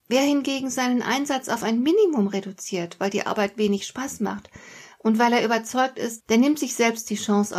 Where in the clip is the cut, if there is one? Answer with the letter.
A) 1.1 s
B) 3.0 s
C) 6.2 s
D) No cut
C